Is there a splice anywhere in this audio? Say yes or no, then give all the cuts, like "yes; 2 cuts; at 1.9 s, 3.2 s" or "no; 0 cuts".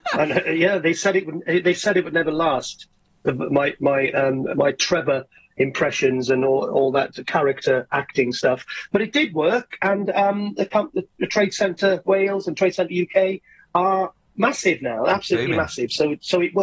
no; 0 cuts